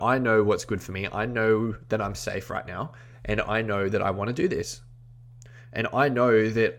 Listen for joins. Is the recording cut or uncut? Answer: uncut